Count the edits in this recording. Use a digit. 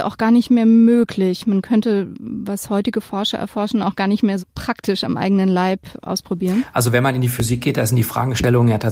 1